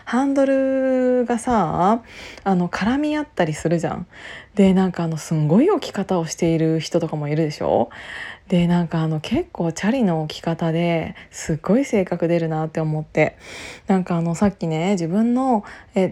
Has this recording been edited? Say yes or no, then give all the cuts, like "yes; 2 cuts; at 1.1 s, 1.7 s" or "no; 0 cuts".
no; 0 cuts